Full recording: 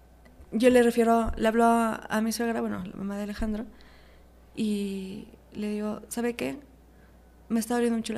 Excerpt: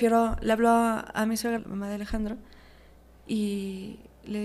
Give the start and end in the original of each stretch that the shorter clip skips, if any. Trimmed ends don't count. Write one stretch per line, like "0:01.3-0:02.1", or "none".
0:02.5-0:02.9